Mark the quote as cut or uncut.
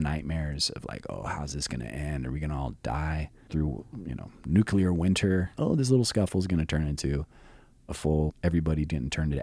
cut